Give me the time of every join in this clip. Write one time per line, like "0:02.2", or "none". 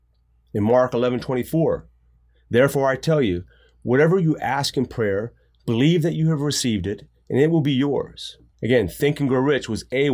0:08.5